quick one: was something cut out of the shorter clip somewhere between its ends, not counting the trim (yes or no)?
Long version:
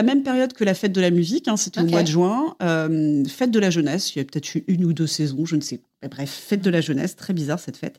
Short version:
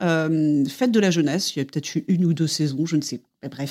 no